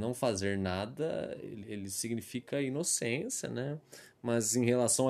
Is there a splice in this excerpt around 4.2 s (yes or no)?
no